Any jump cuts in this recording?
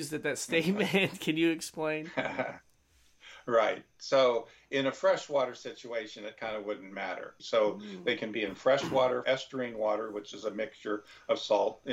yes; 2 cuts; at 7.4 s, 9.2 s

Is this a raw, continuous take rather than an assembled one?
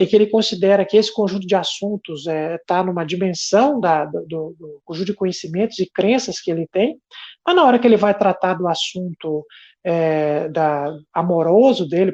yes; 0 cuts

